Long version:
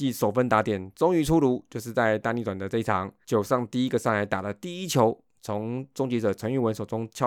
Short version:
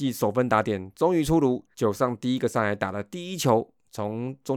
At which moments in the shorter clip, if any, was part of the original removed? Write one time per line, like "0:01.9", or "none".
0:01.7